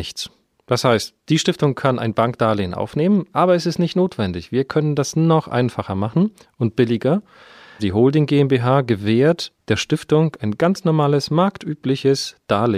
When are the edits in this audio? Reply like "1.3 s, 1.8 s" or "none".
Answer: 7.8 s